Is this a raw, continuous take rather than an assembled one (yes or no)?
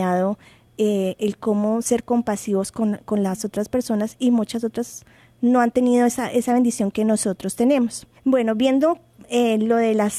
no